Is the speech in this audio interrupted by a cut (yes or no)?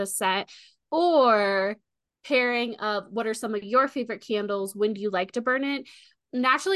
no